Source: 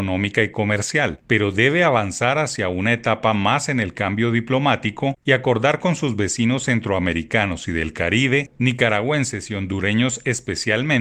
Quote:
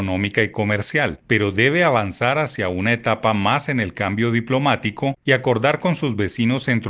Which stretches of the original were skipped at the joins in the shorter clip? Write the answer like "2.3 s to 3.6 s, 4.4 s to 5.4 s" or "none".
none